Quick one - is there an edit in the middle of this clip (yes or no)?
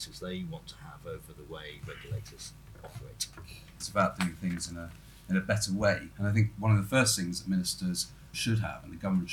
yes